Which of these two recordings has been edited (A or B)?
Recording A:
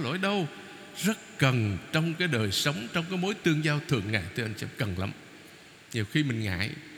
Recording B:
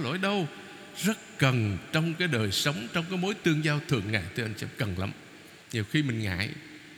B